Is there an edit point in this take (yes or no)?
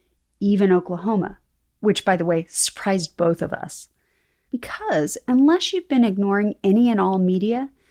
yes